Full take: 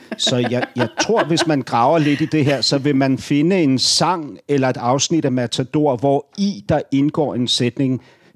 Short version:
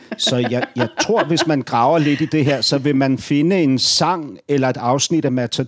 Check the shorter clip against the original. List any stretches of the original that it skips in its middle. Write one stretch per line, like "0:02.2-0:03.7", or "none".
none